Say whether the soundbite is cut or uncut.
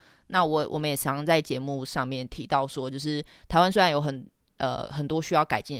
uncut